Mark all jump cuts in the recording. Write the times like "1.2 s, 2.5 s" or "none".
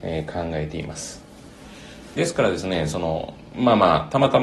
2.1 s